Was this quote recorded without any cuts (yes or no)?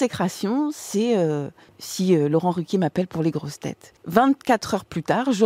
yes